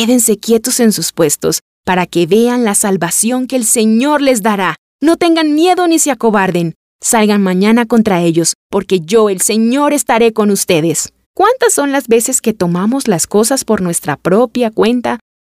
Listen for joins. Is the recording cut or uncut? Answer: cut